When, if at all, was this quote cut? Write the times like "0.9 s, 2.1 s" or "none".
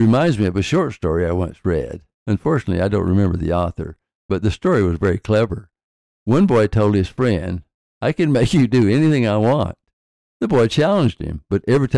none

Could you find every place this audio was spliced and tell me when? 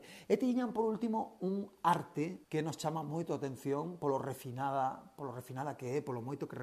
2.4 s

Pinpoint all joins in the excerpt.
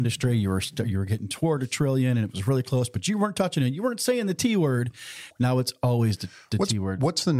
5.3 s

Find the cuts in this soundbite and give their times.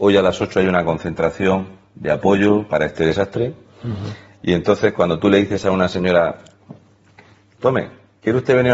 none

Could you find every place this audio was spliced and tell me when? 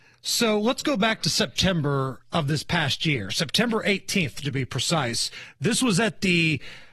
none

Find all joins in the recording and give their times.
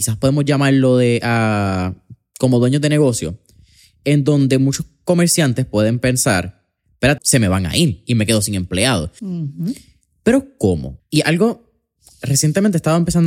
7.2 s, 9.2 s, 11.0 s

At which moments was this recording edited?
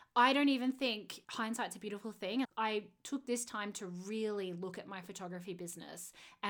1.2 s, 2.4 s

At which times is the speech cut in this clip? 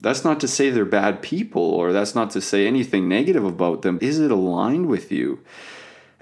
4.0 s

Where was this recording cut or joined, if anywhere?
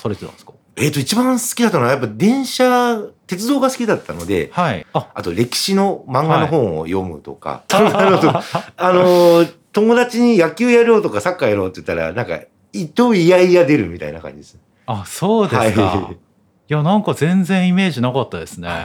4.8 s, 7.7 s

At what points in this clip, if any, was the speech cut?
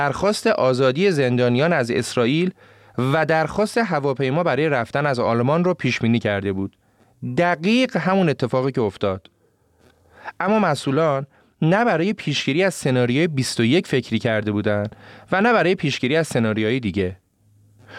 none

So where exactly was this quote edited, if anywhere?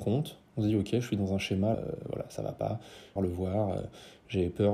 1.7 s, 3.2 s

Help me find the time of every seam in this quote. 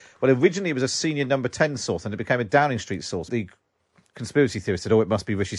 3.3 s

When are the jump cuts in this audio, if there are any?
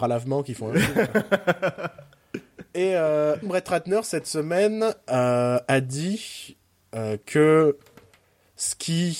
3.4 s

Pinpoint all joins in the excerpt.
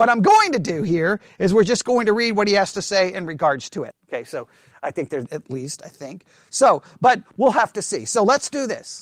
3.9 s, 5.3 s

